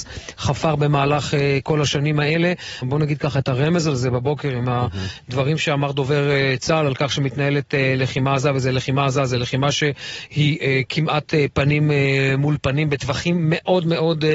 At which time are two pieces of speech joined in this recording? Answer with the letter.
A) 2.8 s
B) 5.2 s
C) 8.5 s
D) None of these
A